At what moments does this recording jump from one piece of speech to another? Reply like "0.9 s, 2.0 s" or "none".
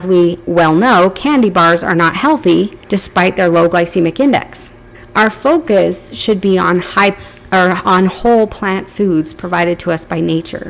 2.8 s, 4.9 s